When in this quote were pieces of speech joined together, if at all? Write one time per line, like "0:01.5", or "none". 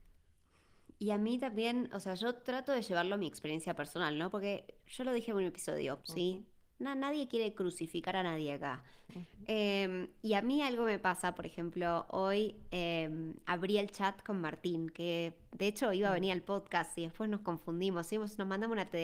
0:06.0
0:09.1